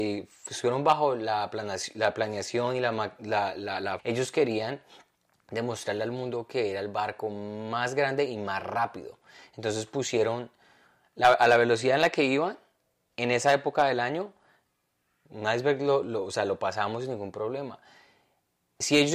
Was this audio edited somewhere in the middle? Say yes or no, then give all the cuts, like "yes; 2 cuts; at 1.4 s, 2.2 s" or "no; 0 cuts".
yes; 2 cuts; at 4.0 s, 15.3 s